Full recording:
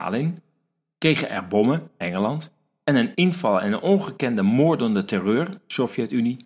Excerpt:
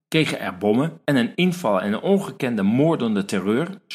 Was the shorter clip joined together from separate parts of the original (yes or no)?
yes